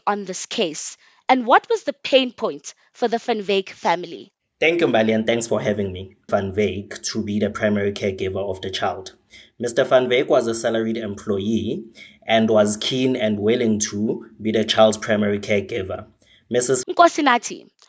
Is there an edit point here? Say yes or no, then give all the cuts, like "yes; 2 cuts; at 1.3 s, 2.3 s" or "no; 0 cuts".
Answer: yes; 2 cuts; at 6.3 s, 16.8 s